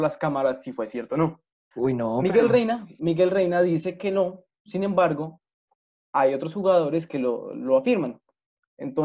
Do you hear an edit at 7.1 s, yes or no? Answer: no